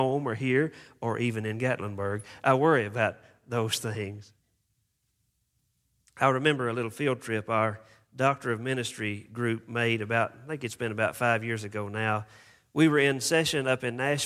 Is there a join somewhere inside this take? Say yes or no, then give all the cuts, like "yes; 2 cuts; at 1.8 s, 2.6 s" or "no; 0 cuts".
no; 0 cuts